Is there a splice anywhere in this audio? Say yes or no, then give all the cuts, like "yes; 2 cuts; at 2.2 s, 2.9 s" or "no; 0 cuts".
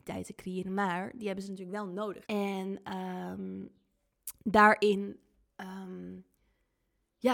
yes; 1 cut; at 2.2 s